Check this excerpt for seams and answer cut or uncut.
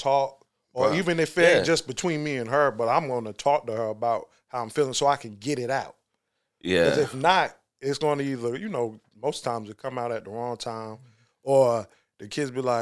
uncut